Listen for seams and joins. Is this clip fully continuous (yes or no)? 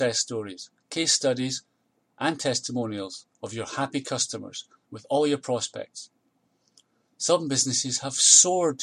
no